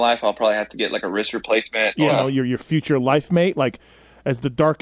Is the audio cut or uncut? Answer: cut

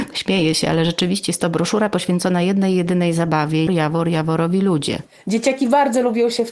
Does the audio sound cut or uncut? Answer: cut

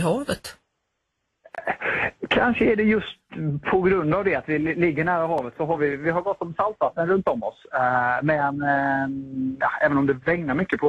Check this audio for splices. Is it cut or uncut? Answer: uncut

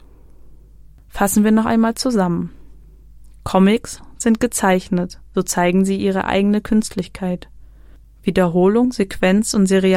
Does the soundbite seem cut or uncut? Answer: cut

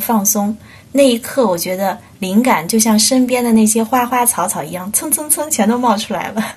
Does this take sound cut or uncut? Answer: uncut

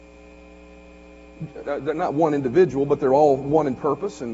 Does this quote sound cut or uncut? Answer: cut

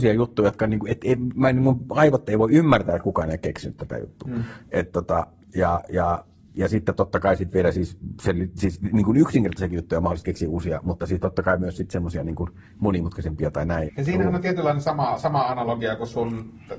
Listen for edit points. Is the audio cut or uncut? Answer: cut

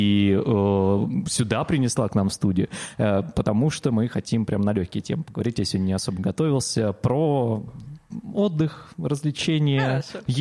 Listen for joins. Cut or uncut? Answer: uncut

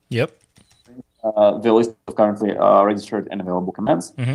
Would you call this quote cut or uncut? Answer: uncut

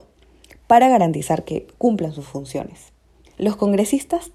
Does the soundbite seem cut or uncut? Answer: cut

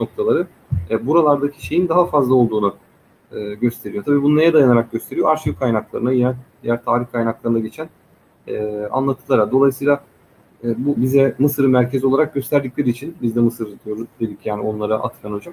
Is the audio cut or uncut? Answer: cut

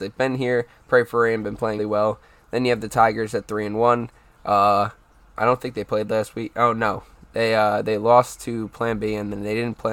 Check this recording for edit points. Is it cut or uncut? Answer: cut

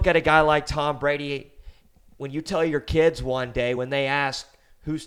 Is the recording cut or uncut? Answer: uncut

